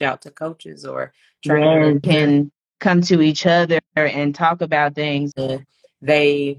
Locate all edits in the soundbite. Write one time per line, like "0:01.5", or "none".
0:02.0
0:05.3